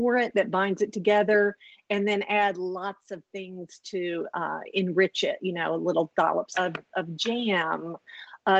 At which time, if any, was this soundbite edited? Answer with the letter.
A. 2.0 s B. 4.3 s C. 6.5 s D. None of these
C